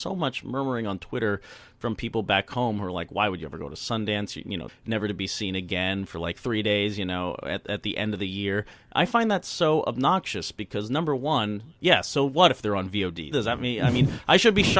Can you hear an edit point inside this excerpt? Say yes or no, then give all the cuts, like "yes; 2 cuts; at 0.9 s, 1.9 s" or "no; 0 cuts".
yes; 2 cuts; at 4.7 s, 13.3 s